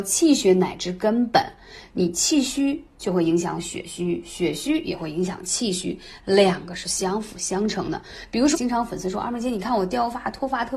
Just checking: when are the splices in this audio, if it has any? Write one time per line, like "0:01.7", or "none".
0:08.5

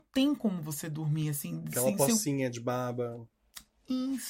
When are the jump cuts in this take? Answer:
none

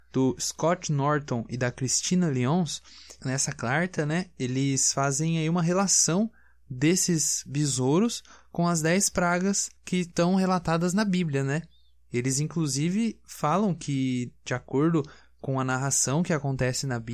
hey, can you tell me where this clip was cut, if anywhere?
none

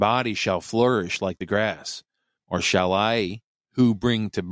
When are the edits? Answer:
0:02.4

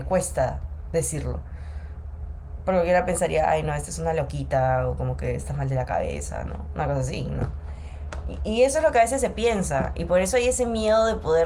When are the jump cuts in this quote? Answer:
none

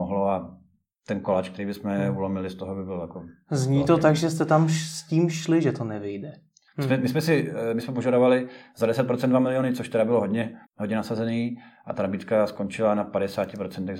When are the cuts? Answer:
0:06.7
0:10.7

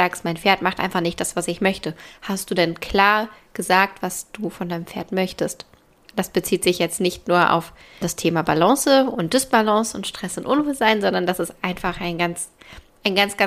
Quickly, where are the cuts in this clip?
none

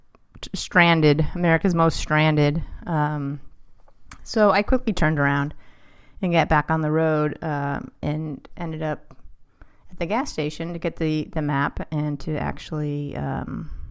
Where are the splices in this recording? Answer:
none

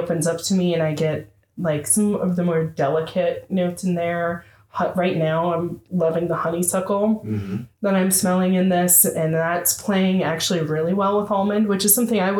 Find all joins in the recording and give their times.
none

